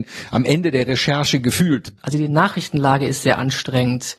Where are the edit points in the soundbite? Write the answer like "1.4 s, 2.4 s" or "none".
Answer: 2.0 s